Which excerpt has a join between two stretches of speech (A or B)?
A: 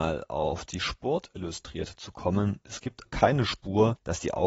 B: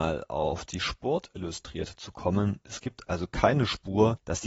A